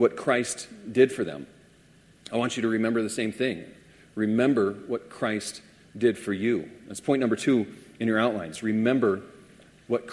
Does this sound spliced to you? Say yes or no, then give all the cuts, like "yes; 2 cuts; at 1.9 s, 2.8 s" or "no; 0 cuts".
no; 0 cuts